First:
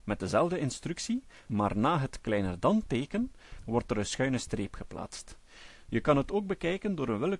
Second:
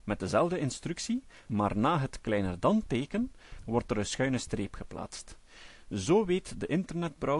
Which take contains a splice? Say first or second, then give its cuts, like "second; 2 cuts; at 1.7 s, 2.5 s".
first; 1 cut; at 5.8 s